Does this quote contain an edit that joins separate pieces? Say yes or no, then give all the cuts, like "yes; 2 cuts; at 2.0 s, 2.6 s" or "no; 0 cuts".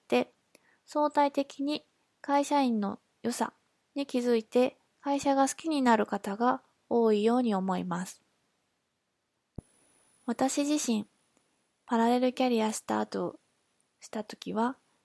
no; 0 cuts